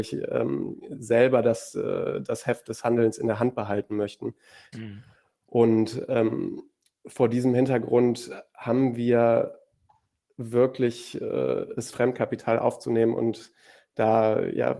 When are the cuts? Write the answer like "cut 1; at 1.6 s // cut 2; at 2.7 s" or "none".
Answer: cut 1; at 4.7 s // cut 2; at 11.9 s